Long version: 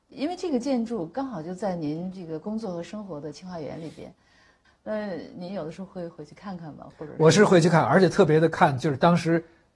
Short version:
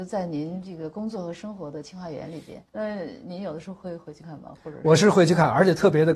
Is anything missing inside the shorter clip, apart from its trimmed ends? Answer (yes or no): yes